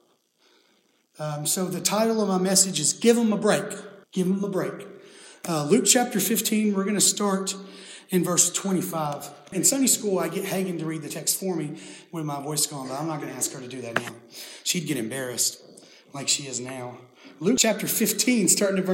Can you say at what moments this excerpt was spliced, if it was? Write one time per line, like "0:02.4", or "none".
0:04.0